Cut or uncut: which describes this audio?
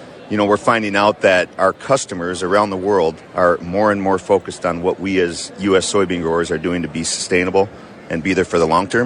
cut